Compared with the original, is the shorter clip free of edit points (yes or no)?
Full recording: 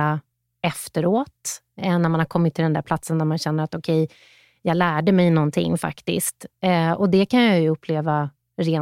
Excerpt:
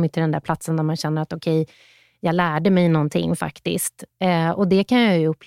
yes